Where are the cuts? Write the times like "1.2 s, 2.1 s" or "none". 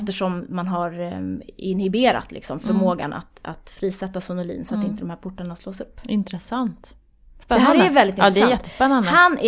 none